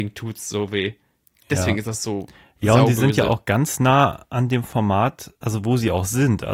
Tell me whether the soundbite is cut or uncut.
cut